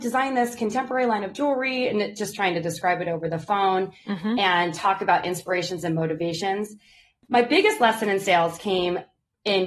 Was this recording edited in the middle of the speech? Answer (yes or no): no